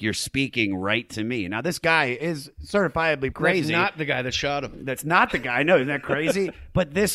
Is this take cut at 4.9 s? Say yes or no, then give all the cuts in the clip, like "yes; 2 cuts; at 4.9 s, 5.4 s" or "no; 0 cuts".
no; 1 cut; at 3.3 s